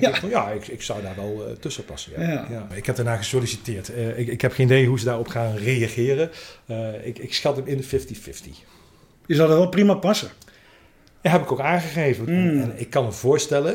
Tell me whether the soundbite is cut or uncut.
cut